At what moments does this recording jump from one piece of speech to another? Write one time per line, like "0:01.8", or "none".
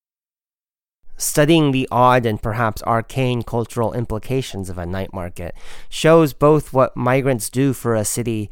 none